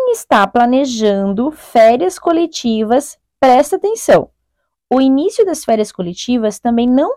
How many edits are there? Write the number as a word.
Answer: zero